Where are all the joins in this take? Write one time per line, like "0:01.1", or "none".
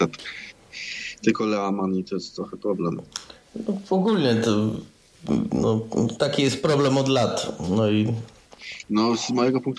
none